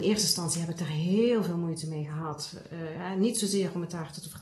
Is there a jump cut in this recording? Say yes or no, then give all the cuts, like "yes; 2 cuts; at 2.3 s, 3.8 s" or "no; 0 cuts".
no; 0 cuts